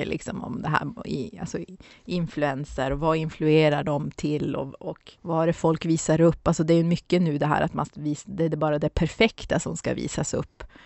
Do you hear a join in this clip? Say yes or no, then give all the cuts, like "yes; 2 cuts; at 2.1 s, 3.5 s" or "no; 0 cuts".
yes; 1 cut; at 5.2 s